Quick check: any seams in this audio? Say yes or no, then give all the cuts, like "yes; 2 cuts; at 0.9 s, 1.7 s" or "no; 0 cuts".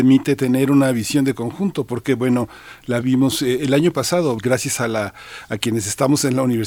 yes; 2 cuts; at 3.0 s, 4.4 s